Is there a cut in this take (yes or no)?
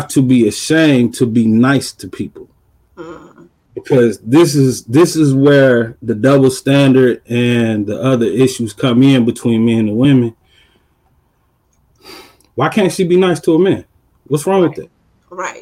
yes